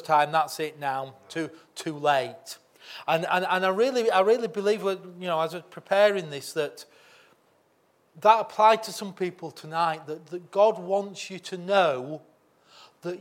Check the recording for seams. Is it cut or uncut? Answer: uncut